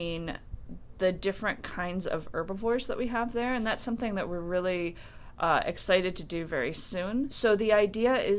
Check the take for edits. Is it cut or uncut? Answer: cut